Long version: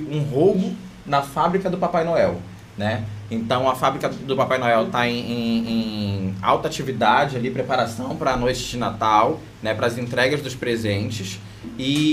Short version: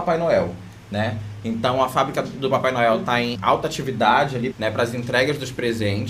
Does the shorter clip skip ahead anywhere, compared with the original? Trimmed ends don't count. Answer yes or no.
yes